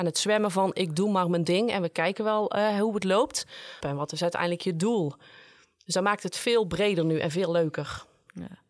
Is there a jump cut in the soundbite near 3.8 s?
yes; 1 cut; at 3.8 s

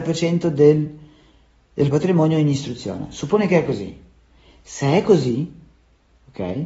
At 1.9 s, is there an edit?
yes; 1 cut; at 1.9 s

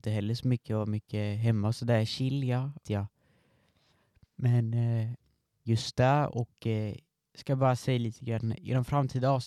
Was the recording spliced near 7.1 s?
no; 2 cuts; at 2.8 s, 5.6 s

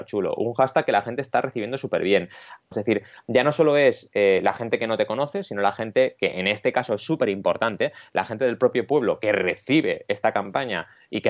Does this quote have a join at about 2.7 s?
yes; 1 cut; at 2.7 s

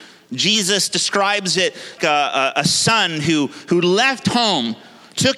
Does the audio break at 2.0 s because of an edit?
yes; 1 cut; at 2.0 s

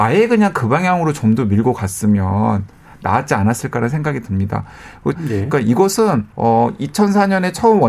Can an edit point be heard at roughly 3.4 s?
no; 2 cuts; at 5.1 s, 6.3 s

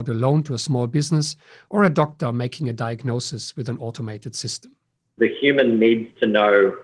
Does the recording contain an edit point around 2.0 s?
no; 1 cut; at 5.2 s

